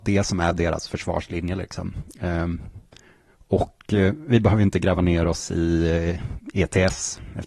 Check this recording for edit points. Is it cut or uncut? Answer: uncut